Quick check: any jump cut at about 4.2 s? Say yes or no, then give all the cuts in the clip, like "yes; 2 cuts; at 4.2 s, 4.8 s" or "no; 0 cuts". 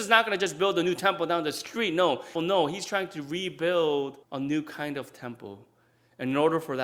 yes; 2 cuts; at 2.4 s, 4.2 s